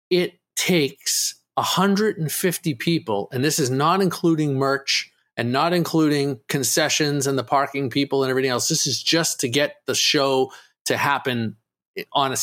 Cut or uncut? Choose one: uncut